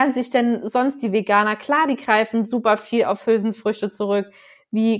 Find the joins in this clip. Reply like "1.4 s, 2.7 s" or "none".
none